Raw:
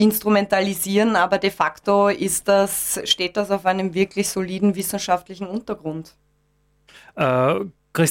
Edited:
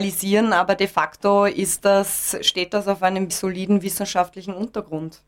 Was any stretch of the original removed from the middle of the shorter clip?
yes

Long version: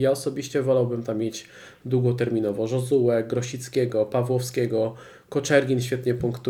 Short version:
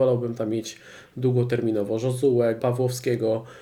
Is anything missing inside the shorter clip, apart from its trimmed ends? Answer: yes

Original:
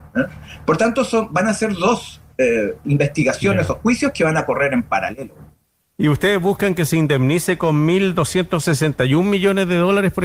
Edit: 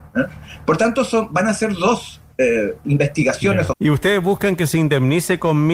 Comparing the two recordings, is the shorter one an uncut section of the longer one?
no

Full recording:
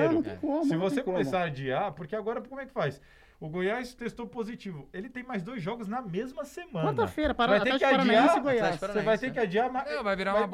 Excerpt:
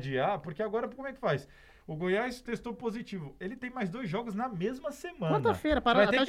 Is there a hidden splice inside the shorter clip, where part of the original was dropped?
no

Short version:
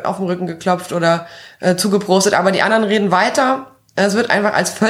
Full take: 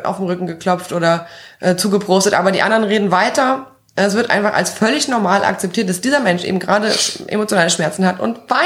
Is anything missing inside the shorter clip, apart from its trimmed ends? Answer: no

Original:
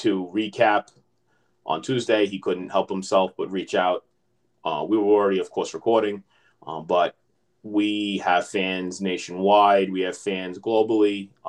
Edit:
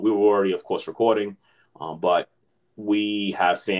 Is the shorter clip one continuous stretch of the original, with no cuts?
yes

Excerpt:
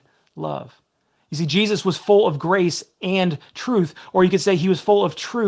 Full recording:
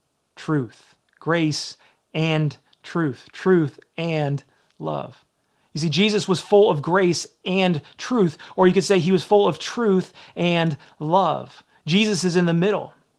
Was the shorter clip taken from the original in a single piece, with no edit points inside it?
yes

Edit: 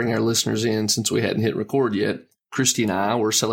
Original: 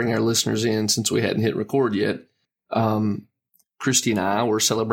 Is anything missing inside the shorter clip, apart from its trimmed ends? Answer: yes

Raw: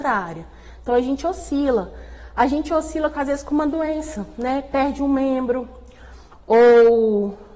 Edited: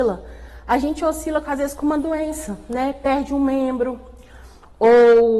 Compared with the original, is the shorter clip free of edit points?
yes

